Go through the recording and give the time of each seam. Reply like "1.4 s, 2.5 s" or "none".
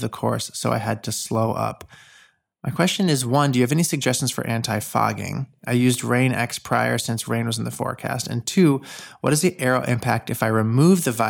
none